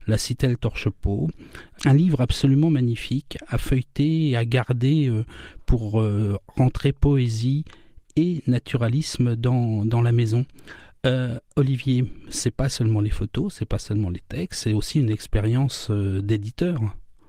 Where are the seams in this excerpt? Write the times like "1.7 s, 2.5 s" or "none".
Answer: none